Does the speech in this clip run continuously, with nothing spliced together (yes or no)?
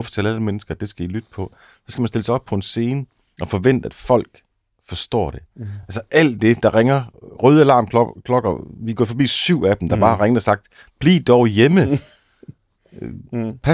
yes